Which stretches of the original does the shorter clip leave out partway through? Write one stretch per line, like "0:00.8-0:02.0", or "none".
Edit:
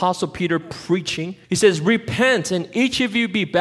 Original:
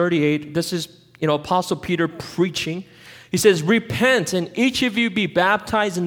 0:02.9-0:03.3